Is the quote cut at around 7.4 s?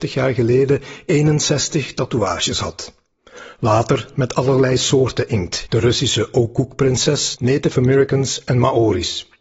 yes; 2 cuts; at 5.7 s, 7.4 s

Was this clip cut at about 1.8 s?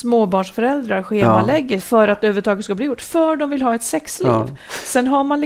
yes; 1 cut; at 1.8 s

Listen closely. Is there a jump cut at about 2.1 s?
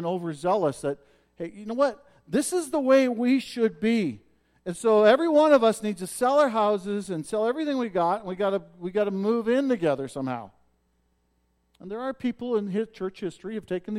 no; 0 cuts

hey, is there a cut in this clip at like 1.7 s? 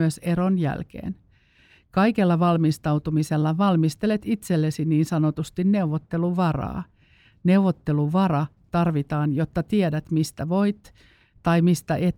no; 0 cuts

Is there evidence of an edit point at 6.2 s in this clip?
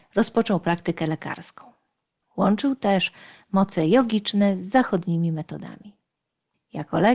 no; 1 cut; at 2.2 s

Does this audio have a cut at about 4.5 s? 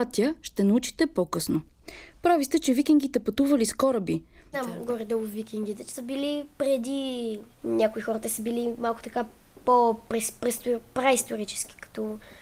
yes; 2 cuts; at 4.5 s, 7.5 s

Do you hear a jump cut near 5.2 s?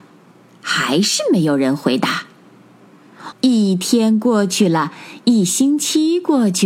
no; 1 cut; at 3.3 s

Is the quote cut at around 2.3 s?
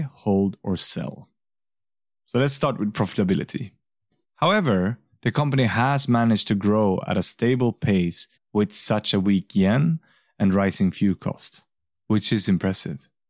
no; 2 cuts; at 4.2 s, 8.3 s

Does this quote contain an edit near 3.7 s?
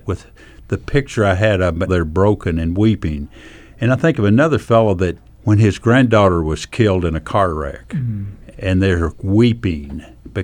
no; 3 cuts; at 1.9 s, 5.2 s, 8.5 s

